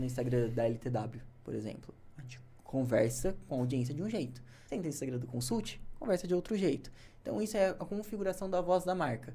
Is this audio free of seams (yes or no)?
no